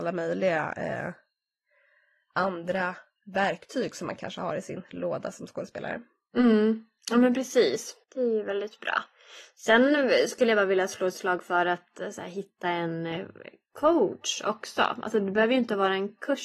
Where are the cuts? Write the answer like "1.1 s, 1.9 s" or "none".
8.0 s